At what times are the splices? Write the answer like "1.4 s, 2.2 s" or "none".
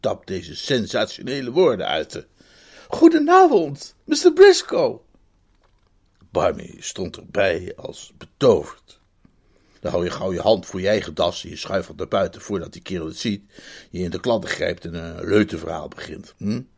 9.8 s